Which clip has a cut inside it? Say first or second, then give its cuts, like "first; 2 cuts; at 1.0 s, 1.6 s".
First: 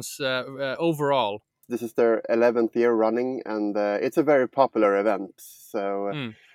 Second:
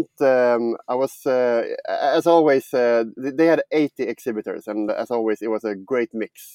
first; 2 cuts; at 1.6 s, 5.4 s